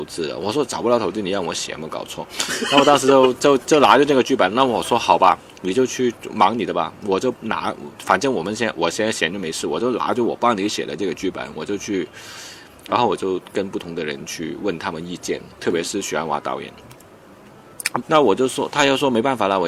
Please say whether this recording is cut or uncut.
cut